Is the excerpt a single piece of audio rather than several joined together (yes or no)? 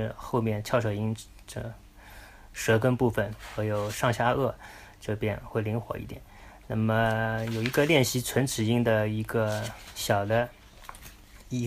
yes